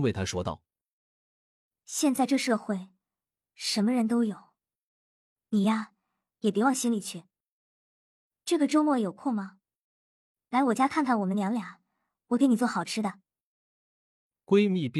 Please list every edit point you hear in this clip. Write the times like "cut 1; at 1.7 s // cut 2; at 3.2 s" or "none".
none